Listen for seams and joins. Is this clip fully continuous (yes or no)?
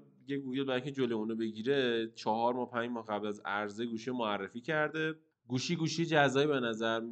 yes